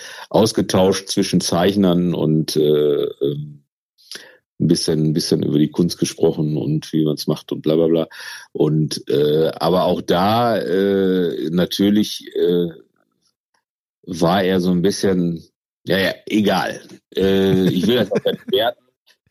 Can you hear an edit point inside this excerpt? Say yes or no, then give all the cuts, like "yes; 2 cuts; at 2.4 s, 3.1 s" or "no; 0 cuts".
no; 0 cuts